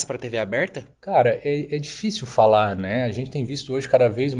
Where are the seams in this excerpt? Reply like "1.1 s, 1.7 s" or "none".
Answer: 0.9 s

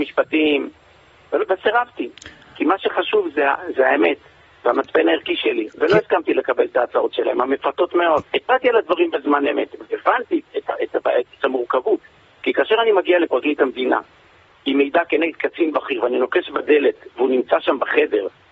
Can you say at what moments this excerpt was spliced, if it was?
8.2 s, 9.8 s

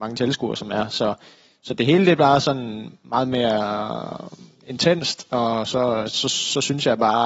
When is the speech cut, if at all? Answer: none

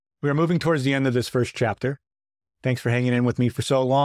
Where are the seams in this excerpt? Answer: none

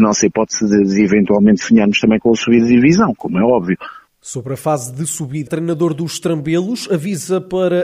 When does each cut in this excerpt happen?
4.1 s, 5.5 s

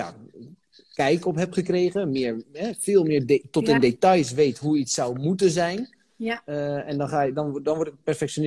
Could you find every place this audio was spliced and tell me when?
none

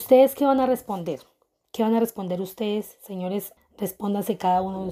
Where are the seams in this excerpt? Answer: 3.6 s

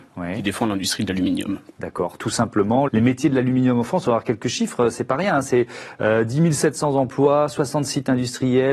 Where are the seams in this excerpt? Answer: 2.9 s

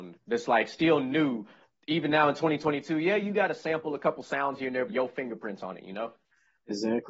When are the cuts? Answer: 4.9 s

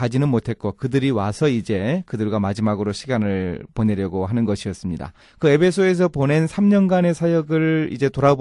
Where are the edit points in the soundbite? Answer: 5.2 s

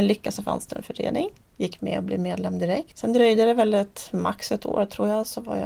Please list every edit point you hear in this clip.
none

